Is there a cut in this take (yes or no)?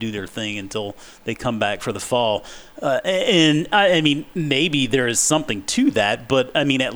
no